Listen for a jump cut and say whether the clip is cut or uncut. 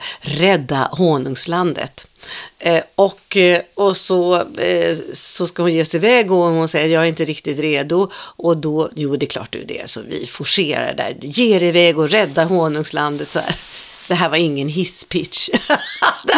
uncut